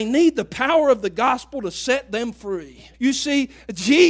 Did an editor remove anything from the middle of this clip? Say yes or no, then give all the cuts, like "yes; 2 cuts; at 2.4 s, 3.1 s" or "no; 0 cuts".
yes; 1 cut; at 2.9 s